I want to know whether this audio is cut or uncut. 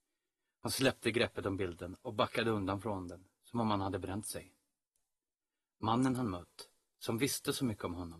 uncut